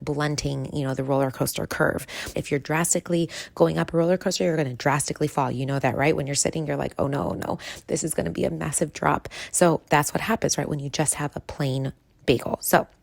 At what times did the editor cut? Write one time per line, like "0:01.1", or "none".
0:02.3